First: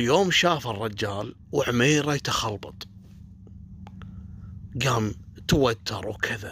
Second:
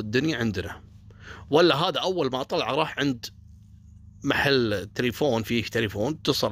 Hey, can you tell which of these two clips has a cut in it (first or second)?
first